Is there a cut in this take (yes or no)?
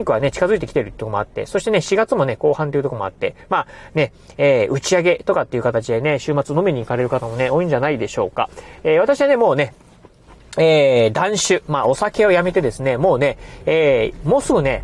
no